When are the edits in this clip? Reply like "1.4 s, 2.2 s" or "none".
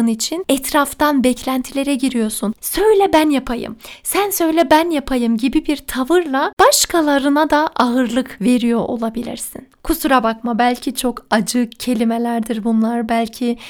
2.6 s